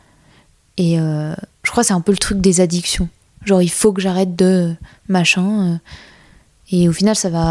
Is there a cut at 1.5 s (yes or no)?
yes